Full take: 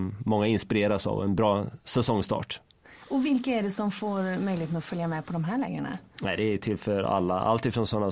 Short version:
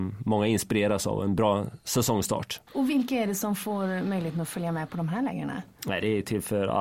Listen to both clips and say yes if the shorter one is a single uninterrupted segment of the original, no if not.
no